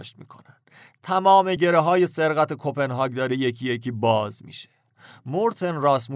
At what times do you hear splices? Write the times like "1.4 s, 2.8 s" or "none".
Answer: none

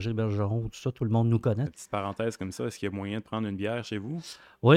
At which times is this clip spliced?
1.7 s

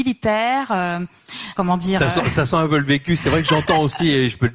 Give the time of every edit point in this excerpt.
1.5 s

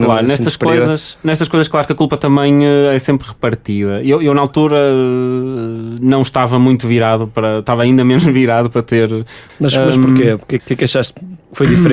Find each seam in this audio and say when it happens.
9.5 s, 10.6 s

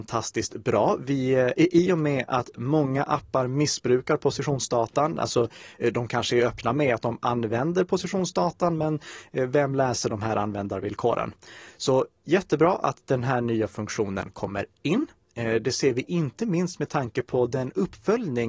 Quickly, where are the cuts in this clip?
none

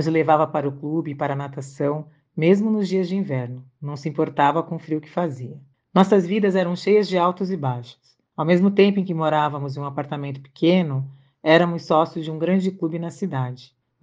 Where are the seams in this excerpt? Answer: none

